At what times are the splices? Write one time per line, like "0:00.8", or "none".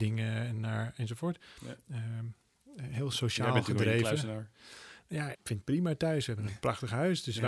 0:05.3